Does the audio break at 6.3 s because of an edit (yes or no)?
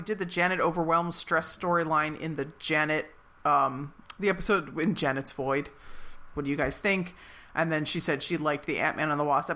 yes